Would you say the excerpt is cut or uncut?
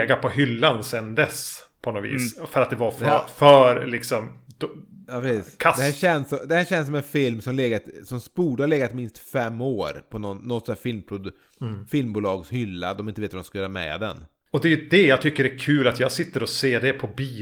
uncut